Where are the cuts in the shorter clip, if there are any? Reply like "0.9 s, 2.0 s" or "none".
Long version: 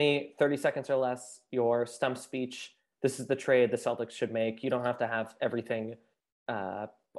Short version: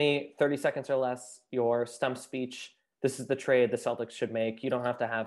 none